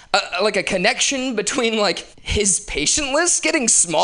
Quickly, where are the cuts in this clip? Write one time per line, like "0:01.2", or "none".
0:02.1